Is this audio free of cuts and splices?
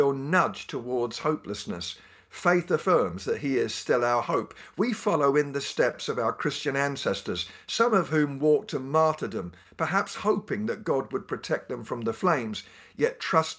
yes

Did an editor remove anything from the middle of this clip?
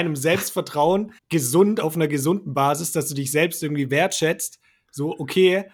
yes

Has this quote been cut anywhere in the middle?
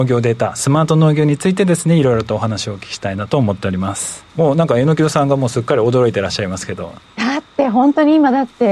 yes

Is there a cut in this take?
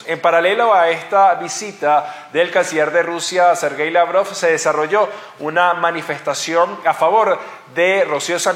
no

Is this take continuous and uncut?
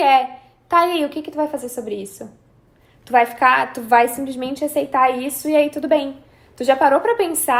yes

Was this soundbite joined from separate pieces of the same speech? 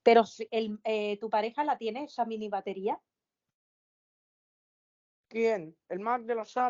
no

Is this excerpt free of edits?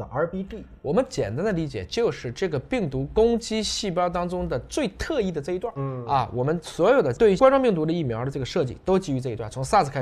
no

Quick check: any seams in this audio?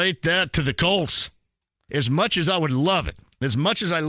yes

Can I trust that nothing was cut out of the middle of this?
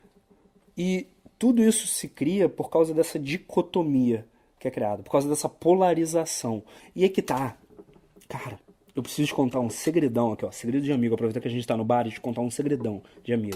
no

